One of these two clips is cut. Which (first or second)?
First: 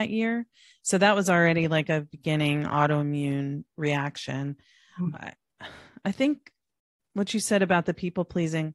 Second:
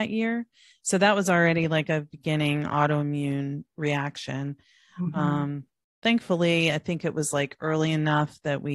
first